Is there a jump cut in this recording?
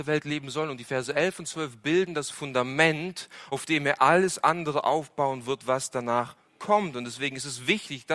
no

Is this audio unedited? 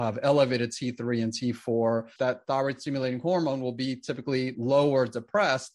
no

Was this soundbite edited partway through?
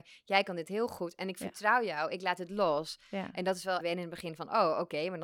yes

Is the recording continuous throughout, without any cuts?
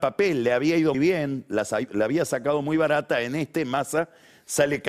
no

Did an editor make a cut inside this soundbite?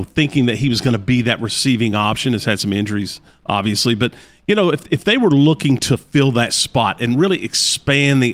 no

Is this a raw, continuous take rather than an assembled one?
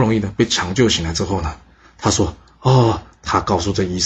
no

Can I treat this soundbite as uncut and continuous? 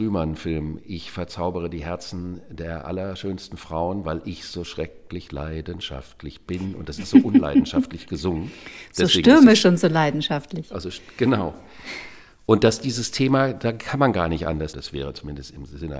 no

